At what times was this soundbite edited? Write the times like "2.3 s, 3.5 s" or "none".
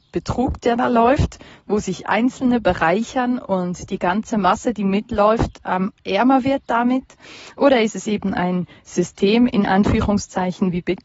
none